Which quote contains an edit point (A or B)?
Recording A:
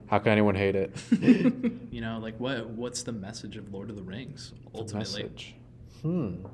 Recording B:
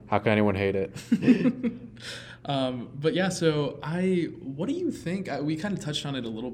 A